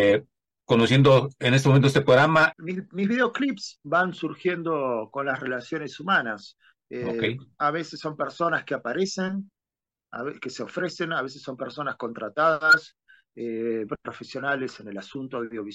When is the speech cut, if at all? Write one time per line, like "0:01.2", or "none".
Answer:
0:02.5
0:13.9

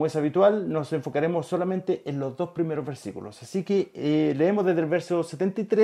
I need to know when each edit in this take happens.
none

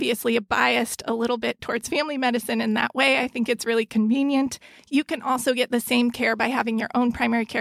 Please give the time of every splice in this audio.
none

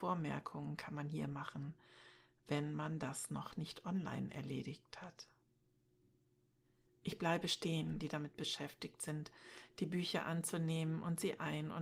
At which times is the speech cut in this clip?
0:08.0

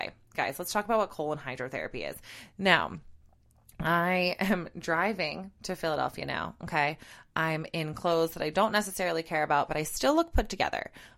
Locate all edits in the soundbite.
0:02.5

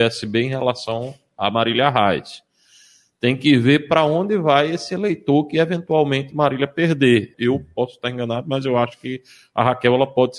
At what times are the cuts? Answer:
0:07.3

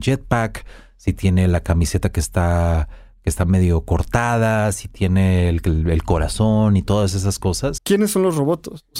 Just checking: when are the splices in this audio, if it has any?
0:07.8

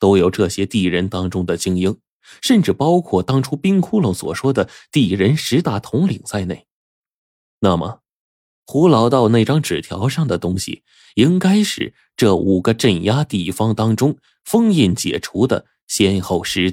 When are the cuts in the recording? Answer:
none

